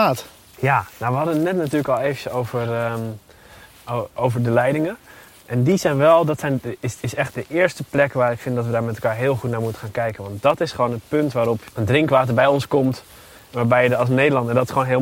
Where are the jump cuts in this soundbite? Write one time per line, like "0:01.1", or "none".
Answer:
none